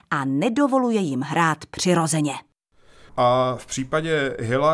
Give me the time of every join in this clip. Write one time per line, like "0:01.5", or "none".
0:03.1

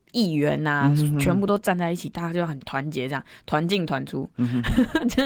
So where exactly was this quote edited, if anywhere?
none

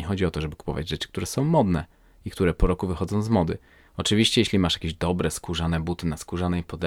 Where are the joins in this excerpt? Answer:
0:03.9

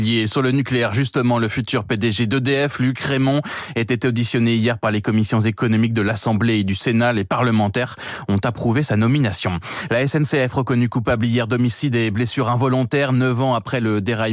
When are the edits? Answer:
none

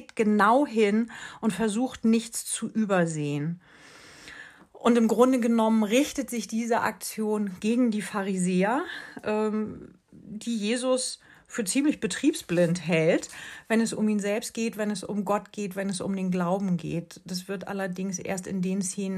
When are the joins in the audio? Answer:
none

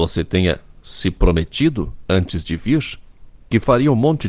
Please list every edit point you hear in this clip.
none

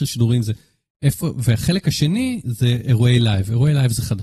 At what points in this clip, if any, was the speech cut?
0:02.4

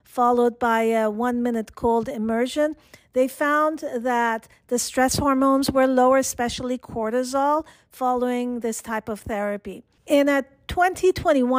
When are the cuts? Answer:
0:10.0

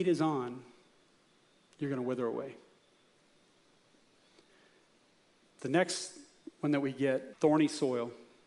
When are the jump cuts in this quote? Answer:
0:07.3

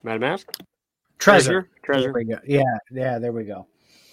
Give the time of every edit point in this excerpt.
0:01.0

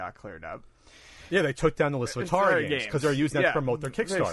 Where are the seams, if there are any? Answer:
none

